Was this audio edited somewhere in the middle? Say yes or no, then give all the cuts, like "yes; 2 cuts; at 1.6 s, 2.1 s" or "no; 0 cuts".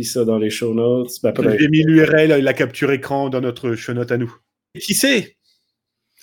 yes; 1 cut; at 4.7 s